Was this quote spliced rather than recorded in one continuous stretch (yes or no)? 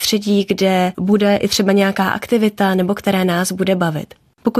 no